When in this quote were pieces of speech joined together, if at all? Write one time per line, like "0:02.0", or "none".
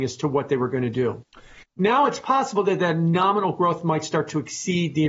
0:01.6